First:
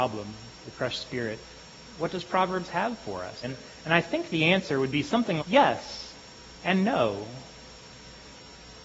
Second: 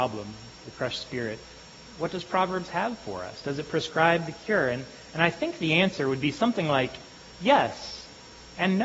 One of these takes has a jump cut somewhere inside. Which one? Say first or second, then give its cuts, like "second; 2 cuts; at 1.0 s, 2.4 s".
first; 2 cuts; at 3.4 s, 5.4 s